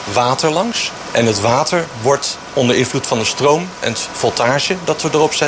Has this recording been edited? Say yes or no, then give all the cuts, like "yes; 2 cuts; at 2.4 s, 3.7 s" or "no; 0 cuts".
no; 0 cuts